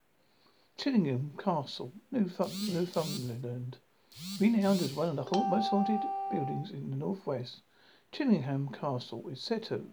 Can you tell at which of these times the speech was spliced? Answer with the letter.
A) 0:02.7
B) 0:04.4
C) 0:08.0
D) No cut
D